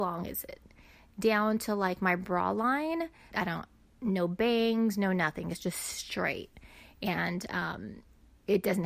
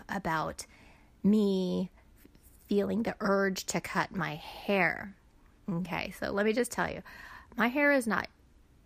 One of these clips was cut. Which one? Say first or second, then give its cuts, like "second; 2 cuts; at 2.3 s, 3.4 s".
first; 1 cut; at 3.3 s